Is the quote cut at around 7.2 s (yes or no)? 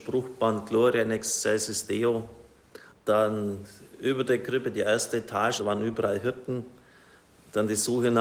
no